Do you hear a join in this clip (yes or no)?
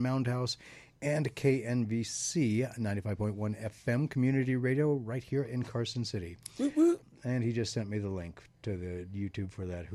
no